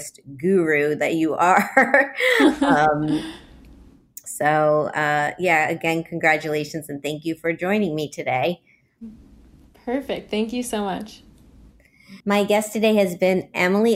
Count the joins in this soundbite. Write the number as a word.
one